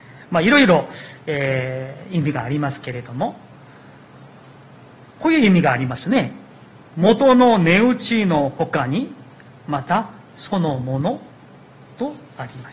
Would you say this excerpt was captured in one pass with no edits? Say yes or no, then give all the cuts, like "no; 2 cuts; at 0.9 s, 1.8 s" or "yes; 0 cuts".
no; 2 cuts; at 6.8 s, 9.6 s